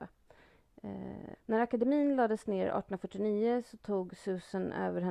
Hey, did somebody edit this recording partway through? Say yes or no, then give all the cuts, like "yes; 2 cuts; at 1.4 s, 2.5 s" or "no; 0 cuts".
yes; 1 cut; at 1.4 s